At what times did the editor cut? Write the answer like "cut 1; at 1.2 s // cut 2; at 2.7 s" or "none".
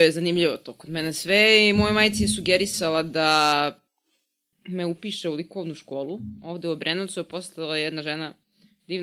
none